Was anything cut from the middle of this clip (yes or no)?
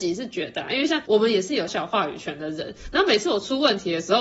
yes